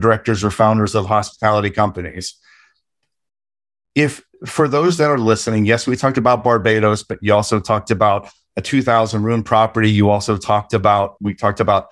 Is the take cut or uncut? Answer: uncut